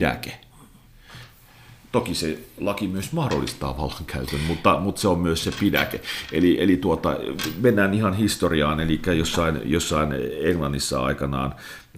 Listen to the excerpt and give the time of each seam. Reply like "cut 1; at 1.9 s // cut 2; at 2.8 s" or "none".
none